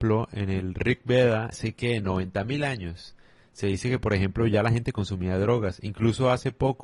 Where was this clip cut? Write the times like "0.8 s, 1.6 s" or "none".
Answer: 1.5 s